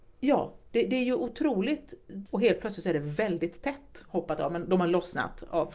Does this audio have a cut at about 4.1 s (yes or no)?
yes